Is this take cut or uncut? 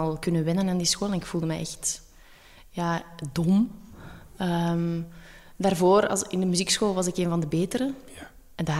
uncut